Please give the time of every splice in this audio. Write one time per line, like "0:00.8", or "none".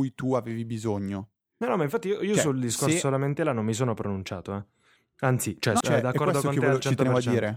0:05.8